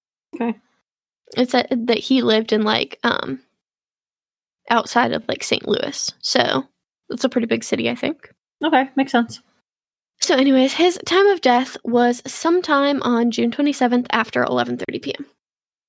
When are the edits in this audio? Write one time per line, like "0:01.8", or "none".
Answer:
none